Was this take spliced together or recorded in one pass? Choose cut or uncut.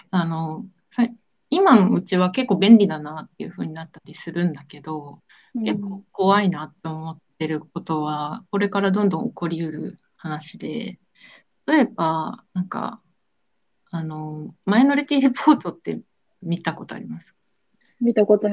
uncut